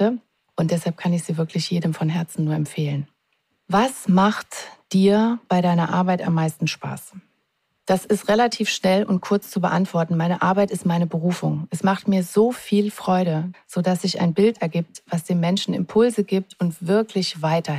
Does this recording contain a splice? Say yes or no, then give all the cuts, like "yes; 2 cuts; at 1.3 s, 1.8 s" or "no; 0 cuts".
yes; 1 cut; at 13.5 s